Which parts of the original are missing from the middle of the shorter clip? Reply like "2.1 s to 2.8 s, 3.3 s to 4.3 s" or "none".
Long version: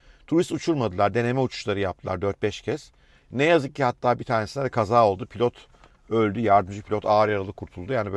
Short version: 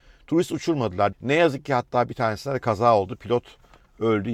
1.1 s to 3.2 s